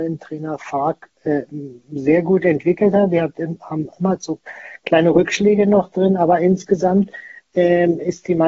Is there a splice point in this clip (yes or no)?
no